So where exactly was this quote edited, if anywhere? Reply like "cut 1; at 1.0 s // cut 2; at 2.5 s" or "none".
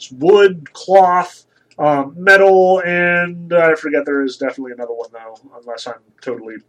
none